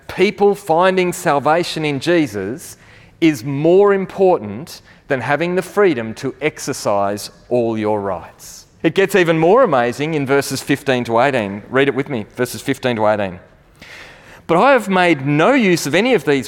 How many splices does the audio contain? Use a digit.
1